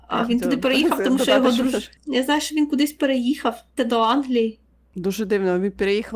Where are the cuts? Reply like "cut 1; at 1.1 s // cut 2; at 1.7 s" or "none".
cut 1; at 2.0 s // cut 2; at 3.8 s